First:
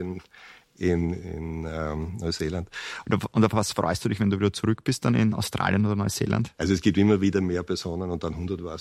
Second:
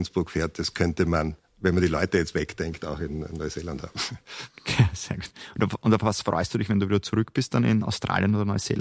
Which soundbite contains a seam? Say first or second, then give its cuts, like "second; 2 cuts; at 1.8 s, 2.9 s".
first; 2 cuts; at 3.0 s, 6.6 s